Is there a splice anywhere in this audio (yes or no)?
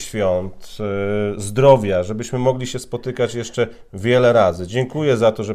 no